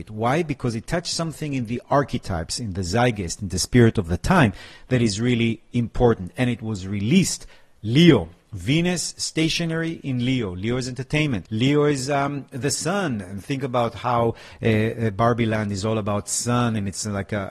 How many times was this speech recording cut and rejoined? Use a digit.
1